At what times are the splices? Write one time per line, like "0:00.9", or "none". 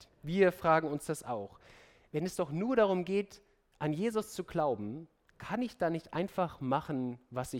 none